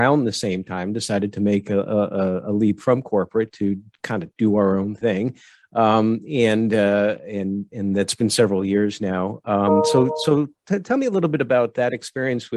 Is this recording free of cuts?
yes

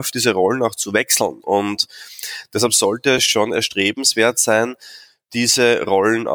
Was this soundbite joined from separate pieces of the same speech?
no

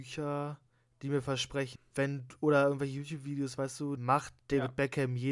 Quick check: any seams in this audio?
yes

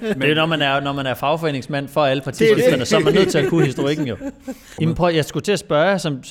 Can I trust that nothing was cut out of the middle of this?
no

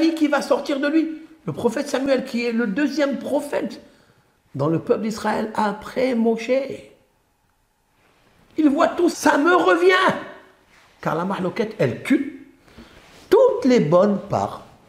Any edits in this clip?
yes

